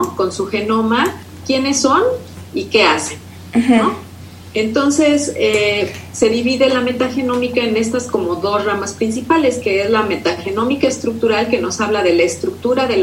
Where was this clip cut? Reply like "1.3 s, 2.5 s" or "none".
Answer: none